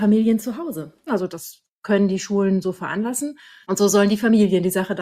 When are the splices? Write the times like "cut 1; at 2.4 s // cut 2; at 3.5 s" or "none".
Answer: cut 1; at 1.1 s // cut 2; at 3.6 s